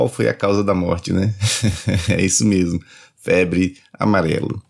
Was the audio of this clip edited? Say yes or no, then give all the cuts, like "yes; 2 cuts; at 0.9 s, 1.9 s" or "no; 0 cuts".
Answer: no; 0 cuts